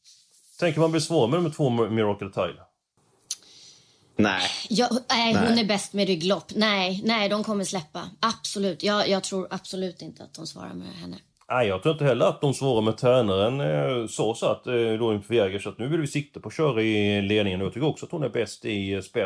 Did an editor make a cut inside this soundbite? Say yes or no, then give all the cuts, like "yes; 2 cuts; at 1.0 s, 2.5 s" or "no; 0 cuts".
no; 0 cuts